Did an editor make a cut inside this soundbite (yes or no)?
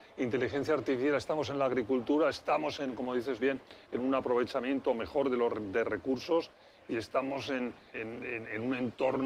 yes